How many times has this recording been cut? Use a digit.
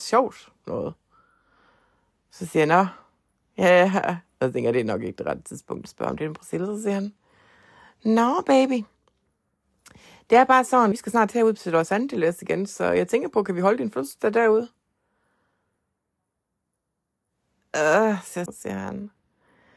2